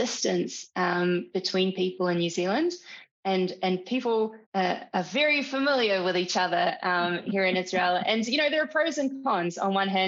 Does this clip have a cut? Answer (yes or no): yes